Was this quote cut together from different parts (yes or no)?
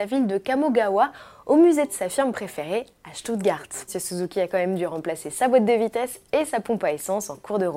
yes